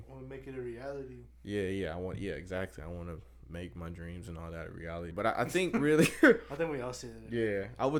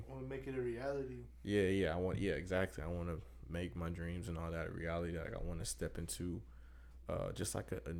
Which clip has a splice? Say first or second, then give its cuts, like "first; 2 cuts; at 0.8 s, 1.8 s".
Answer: first; 1 cut; at 5.1 s